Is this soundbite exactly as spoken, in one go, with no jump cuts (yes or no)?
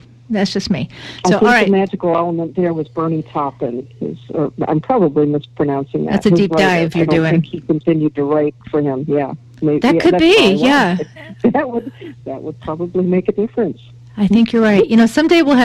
no